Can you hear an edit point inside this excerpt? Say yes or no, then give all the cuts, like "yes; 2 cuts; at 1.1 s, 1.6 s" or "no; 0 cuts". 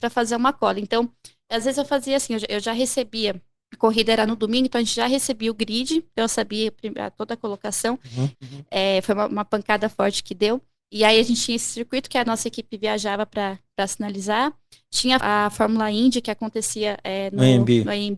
yes; 2 cuts; at 8.3 s, 15.2 s